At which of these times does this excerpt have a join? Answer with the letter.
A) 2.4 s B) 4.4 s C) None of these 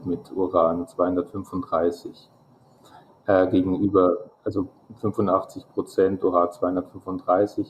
C